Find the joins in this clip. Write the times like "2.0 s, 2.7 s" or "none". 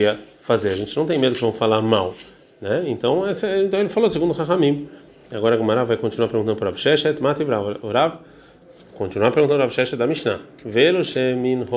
none